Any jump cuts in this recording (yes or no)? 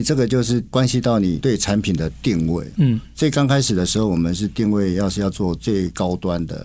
no